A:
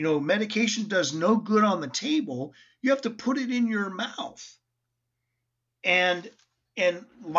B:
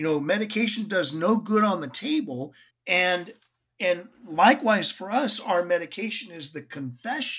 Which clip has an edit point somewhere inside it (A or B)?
B